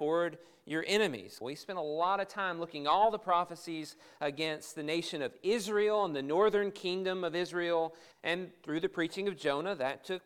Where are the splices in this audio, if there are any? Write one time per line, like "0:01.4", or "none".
0:01.4
0:08.1